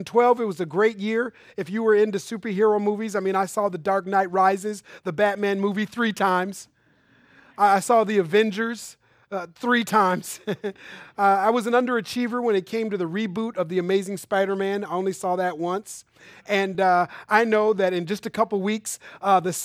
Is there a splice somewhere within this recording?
no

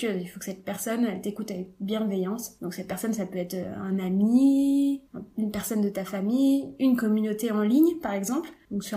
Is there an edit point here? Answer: no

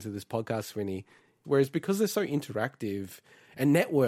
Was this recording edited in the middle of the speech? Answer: yes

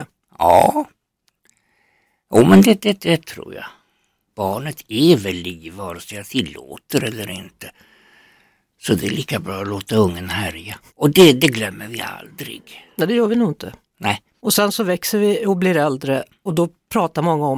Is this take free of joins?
no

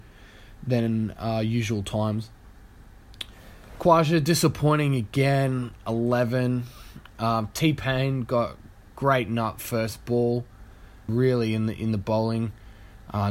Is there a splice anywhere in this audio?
yes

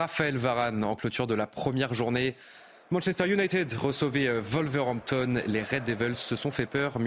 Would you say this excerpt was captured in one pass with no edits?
yes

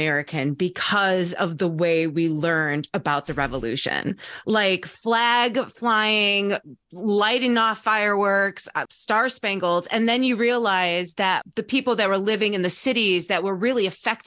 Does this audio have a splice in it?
yes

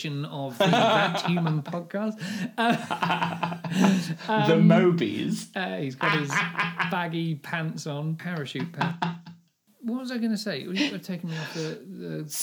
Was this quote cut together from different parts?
no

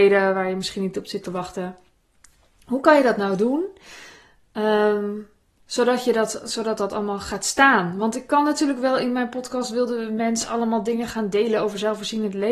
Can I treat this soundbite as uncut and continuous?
yes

